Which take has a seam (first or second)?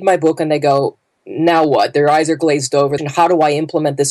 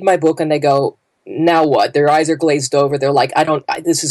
first